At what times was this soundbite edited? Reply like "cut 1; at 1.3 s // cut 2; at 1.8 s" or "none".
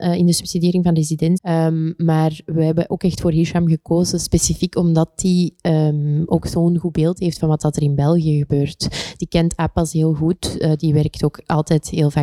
cut 1; at 1.4 s